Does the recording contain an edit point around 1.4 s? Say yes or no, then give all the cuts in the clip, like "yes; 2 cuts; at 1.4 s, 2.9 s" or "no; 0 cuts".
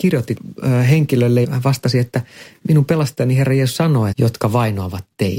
yes; 2 cuts; at 1.4 s, 4.1 s